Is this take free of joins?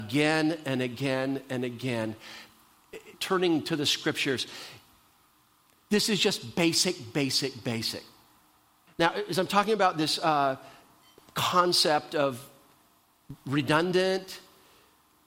no; 2 cuts; at 3.1 s, 8.9 s

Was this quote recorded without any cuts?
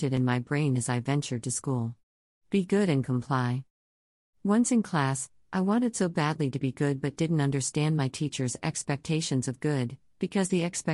yes; 0 cuts

